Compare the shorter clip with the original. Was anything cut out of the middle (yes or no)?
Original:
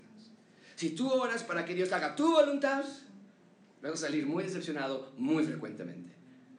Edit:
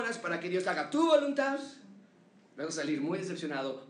no